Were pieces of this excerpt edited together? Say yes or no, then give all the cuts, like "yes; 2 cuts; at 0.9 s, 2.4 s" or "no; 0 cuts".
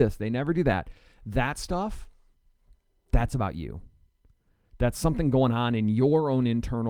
no; 0 cuts